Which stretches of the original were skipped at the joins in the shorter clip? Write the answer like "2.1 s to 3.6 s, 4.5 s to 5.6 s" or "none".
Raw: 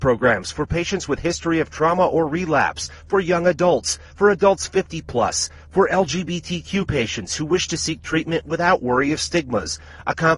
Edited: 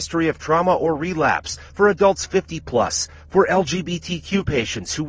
3.0 s to 4.1 s